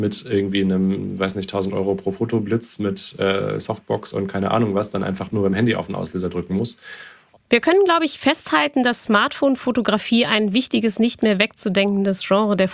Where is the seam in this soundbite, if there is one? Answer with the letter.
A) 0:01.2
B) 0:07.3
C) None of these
B